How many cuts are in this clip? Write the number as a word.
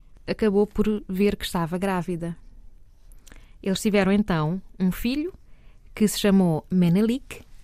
zero